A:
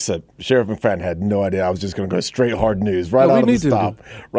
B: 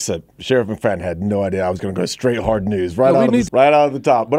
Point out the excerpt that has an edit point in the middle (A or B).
B